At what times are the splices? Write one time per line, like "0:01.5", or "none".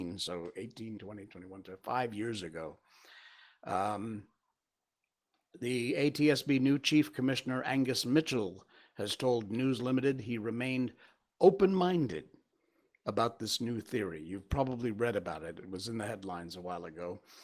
0:01.0